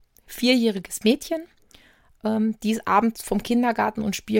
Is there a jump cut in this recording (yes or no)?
no